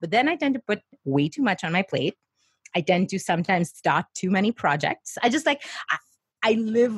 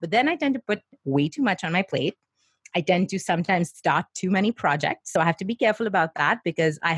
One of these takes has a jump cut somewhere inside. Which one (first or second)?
first